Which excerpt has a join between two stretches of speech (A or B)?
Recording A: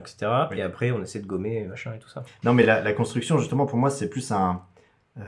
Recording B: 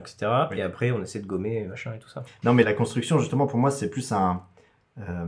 B